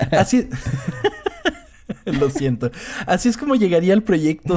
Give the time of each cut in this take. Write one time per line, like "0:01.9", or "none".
none